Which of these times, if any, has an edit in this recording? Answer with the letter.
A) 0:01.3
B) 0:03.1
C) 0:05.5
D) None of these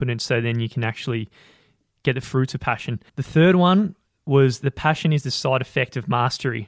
B